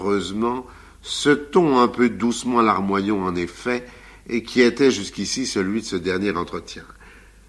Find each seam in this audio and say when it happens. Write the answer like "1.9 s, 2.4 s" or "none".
none